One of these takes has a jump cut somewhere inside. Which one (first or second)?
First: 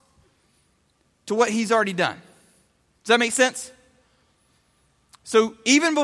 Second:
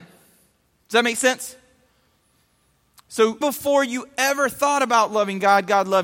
second